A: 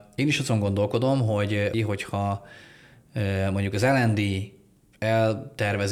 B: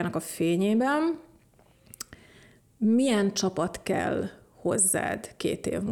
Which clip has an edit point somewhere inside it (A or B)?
A